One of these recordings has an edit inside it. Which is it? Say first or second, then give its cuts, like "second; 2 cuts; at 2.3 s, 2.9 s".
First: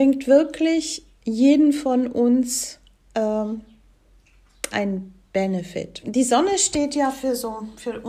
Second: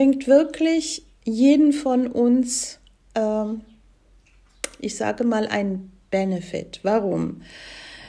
first; 2 cuts; at 4.7 s, 6.0 s